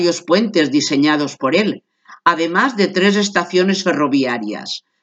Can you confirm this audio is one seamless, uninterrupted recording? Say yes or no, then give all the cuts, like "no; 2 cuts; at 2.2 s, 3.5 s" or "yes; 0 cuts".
yes; 0 cuts